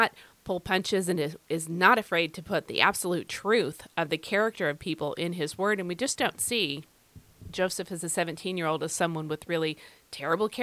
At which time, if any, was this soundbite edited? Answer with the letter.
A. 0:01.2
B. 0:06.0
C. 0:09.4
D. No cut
D